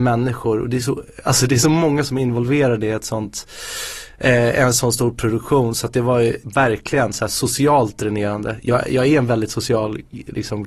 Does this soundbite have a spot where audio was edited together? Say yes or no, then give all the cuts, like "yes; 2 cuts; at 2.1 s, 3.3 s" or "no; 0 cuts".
no; 0 cuts